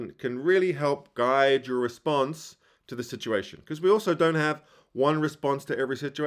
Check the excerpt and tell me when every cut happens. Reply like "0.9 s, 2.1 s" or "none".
none